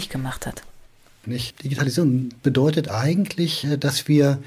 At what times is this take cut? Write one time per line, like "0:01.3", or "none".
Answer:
0:01.2